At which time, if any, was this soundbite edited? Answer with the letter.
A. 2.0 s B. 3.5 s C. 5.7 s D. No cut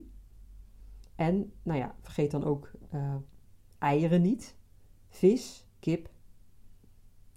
C